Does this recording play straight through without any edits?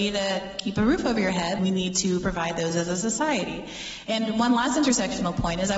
no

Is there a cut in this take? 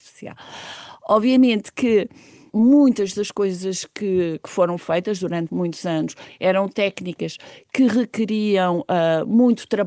yes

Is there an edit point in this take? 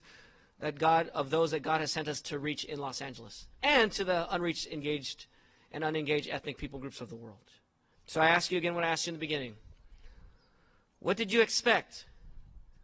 yes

